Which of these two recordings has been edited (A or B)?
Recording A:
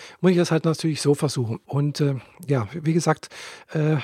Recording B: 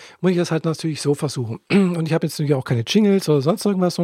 A